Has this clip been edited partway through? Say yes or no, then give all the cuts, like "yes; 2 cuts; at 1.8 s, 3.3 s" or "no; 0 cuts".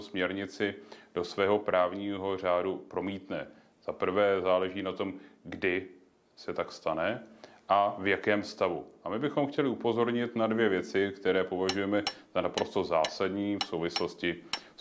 no; 0 cuts